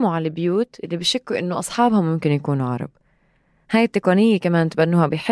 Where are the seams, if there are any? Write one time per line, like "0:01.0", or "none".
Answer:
none